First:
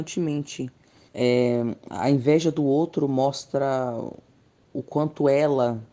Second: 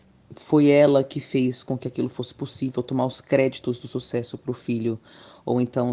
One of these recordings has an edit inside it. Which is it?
first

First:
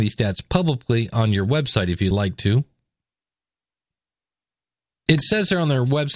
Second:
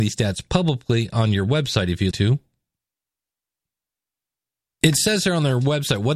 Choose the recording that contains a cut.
second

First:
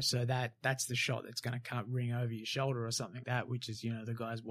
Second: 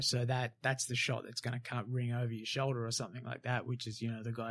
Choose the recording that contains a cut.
first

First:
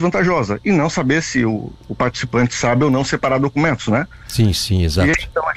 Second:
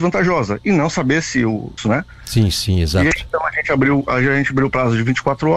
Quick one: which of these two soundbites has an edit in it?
second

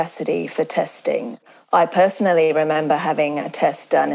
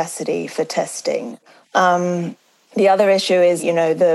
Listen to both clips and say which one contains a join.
second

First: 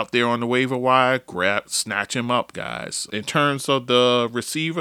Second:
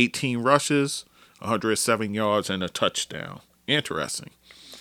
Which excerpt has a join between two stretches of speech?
first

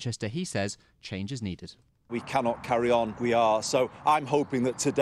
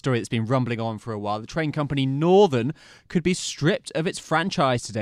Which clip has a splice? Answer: first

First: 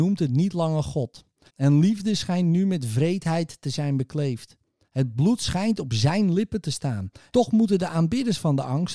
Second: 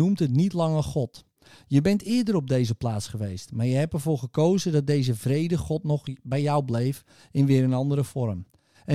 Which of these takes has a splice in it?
first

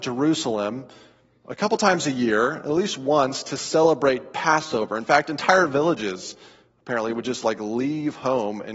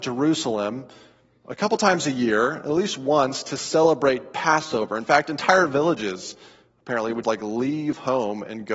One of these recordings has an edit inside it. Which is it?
second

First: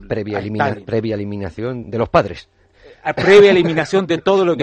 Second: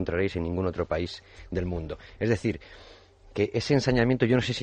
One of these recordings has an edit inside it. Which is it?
first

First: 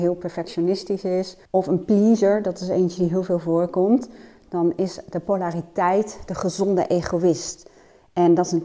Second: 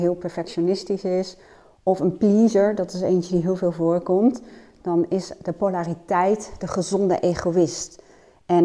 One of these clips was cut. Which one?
first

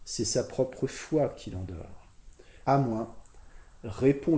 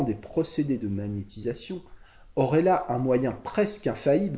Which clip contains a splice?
first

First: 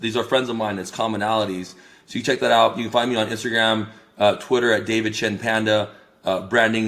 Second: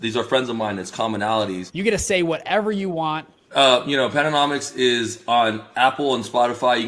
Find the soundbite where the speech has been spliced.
second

